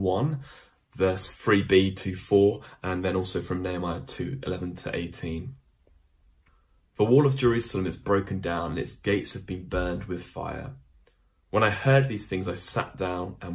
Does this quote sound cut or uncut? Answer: uncut